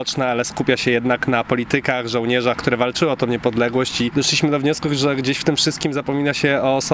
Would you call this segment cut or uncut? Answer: cut